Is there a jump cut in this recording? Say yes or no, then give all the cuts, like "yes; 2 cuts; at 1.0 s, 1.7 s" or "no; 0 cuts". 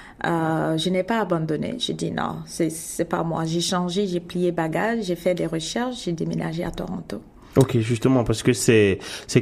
no; 0 cuts